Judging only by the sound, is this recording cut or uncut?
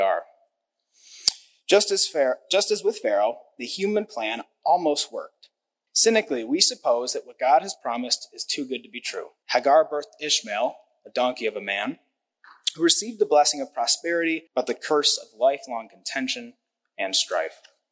cut